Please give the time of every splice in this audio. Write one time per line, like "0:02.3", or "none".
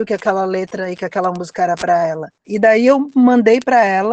0:02.4

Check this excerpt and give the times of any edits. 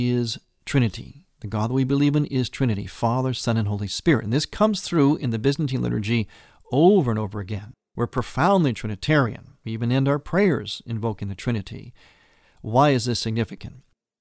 none

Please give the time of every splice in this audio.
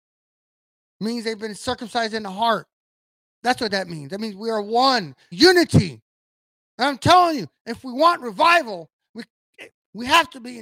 0:05.3

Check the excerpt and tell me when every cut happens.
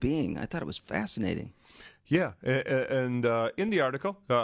none

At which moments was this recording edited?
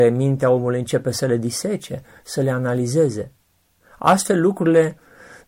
none

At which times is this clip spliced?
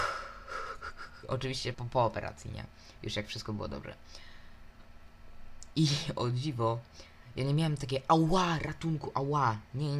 0:01.7
0:05.7

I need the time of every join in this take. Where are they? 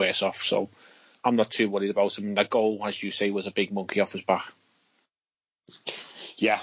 none

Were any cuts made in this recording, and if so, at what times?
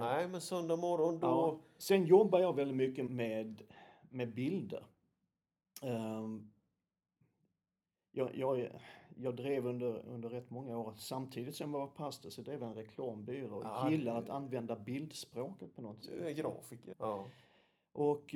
0:03.1
0:16.9

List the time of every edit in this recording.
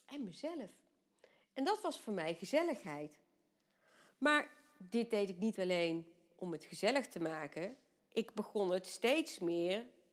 none

